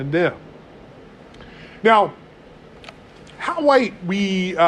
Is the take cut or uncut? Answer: uncut